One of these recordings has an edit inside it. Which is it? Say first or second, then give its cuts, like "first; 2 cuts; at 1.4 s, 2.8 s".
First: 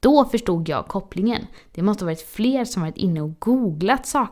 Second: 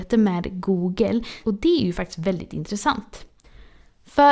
second; 1 cut; at 1.4 s